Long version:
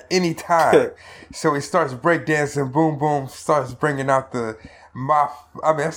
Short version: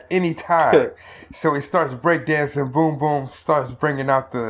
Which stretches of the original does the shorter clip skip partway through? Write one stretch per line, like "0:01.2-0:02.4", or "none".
none